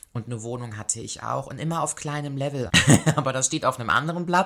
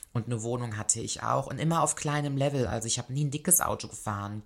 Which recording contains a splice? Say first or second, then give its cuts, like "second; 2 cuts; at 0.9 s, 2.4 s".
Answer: first; 1 cut; at 2.7 s